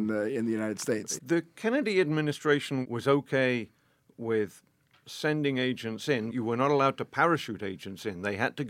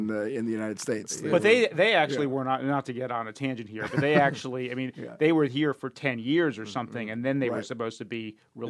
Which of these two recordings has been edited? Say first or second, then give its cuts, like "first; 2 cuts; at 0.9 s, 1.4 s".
first; 2 cuts; at 1.2 s, 6.3 s